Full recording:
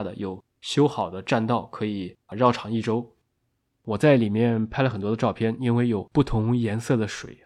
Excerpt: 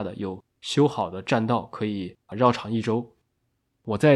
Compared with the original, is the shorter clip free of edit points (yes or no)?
yes